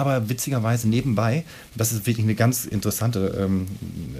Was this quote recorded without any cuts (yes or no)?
yes